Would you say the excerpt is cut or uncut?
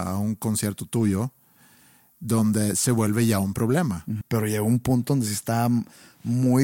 cut